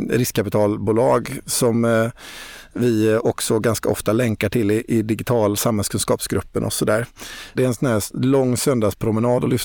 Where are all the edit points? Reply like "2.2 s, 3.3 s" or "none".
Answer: 7.5 s